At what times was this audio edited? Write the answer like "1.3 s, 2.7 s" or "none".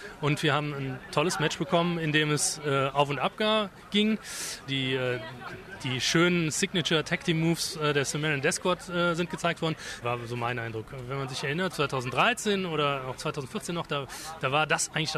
4.7 s, 10.0 s, 11.7 s